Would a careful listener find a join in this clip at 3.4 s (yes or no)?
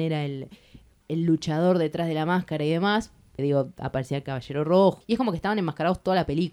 yes